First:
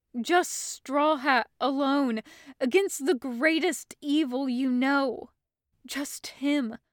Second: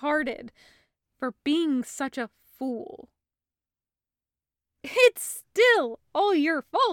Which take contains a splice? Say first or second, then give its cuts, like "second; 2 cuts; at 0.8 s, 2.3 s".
first; 1 cut; at 5.7 s